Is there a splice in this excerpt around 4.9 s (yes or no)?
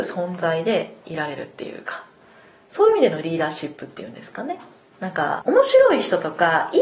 yes